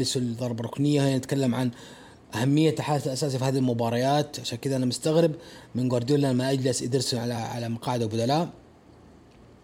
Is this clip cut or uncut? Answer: cut